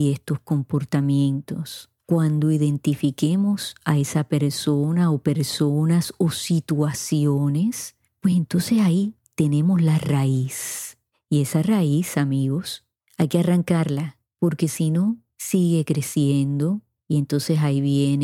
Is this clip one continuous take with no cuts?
yes; 0 cuts

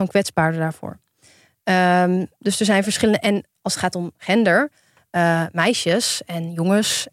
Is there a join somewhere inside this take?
no; 0 cuts

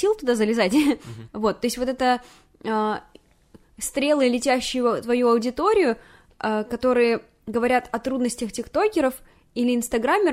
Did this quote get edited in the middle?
yes; 1 cut; at 1.3 s

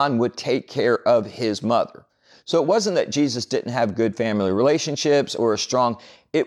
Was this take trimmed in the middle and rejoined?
no; 0 cuts

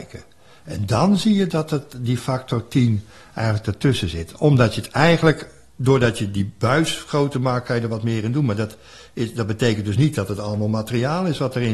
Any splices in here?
no; 0 cuts

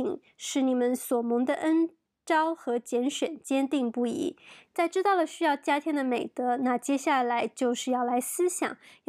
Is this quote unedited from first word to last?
no; 1 cut; at 4.7 s

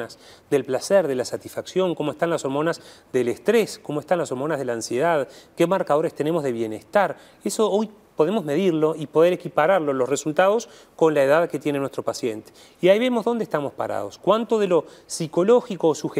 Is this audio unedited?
yes; 0 cuts

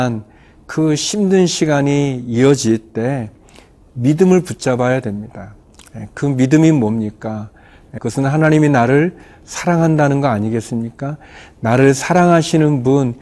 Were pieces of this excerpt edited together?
yes; 1 cut; at 8.0 s

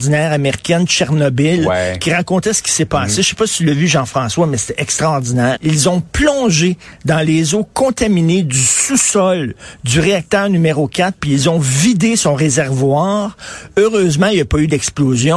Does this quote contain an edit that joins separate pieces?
yes; 1 cut; at 5.5 s

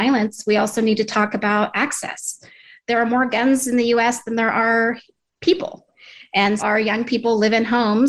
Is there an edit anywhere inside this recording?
yes; 1 cut; at 6.6 s

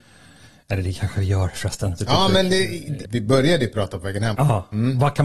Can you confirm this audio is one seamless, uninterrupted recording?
no; 3 cuts; at 2.0 s, 3.0 s, 4.3 s

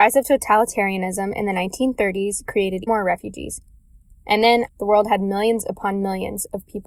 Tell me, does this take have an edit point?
yes; 2 cuts; at 2.9 s, 4.7 s

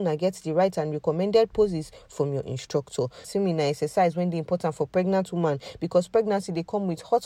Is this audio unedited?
no; 1 cut; at 3.2 s

